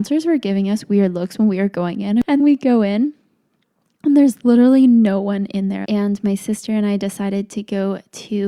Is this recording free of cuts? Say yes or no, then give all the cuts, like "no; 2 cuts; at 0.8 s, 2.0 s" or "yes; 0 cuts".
no; 2 cuts; at 2.4 s, 5.8 s